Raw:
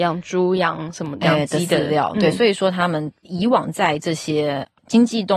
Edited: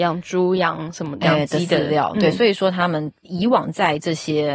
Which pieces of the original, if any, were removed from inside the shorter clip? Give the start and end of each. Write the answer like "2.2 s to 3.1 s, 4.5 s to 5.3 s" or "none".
none